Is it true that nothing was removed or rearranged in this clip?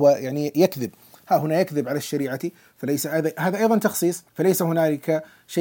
no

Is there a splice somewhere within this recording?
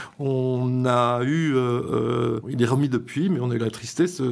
yes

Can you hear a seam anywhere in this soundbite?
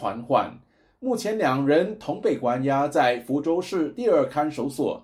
no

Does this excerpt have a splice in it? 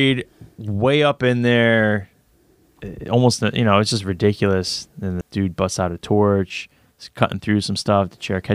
yes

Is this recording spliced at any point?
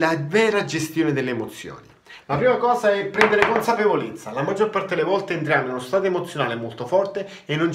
yes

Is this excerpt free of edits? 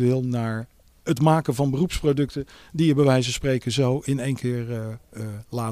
yes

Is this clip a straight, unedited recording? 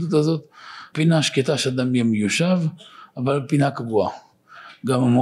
no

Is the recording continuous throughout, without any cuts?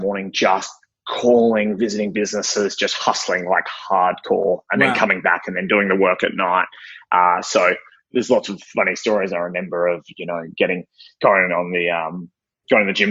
yes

